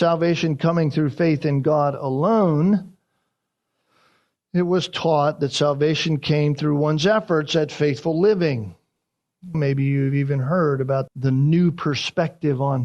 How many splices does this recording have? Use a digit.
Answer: 2